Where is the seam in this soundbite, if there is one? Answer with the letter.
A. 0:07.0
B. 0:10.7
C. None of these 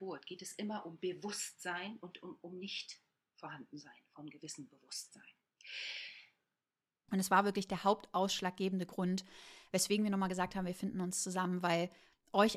A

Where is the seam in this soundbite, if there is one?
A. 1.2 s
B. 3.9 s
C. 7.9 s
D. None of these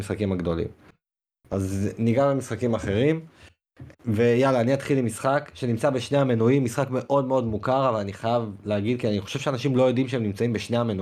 B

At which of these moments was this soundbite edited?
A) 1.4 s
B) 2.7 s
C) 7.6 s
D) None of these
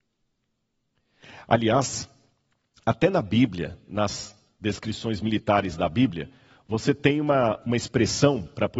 C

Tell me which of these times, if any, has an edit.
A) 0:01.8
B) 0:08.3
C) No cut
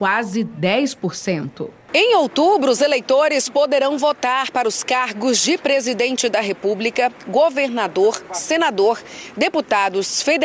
C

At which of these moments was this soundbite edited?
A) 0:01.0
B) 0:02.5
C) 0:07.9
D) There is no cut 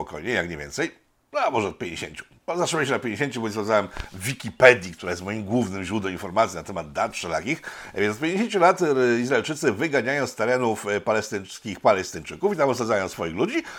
D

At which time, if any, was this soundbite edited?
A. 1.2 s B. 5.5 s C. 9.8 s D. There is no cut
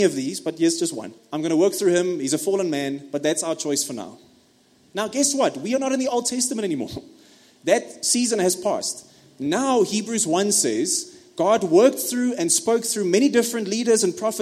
A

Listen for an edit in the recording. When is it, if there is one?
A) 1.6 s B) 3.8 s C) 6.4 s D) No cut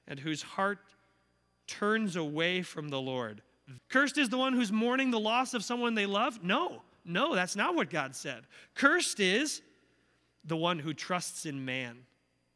B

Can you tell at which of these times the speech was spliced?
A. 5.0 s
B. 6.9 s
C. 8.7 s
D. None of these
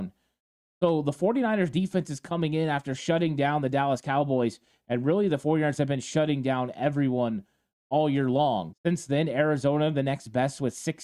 C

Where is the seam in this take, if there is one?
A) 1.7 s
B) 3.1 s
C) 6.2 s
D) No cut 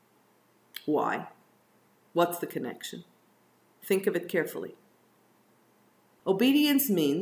C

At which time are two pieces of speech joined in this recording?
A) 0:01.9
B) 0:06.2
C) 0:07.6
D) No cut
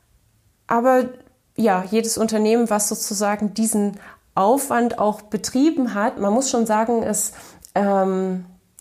B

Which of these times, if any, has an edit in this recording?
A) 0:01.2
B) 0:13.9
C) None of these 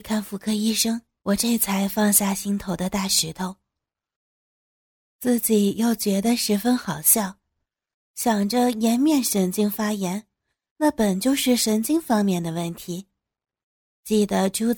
A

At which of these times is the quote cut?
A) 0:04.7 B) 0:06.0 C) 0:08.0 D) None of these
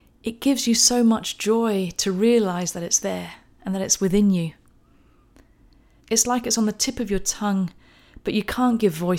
B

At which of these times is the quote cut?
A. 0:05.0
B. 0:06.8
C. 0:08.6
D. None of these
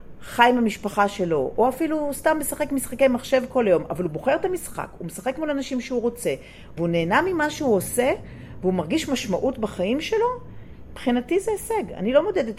B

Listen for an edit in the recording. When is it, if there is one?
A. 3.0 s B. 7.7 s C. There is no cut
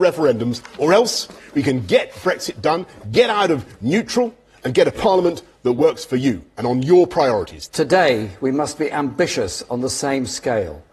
B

